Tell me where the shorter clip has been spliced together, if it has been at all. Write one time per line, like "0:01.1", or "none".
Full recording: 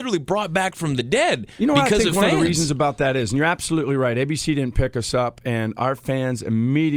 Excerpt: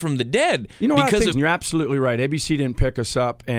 0:01.3